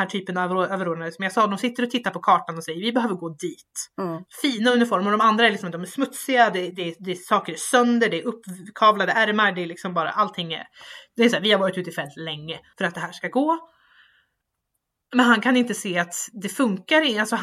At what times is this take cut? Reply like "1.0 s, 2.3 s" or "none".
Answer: 4.3 s, 12.7 s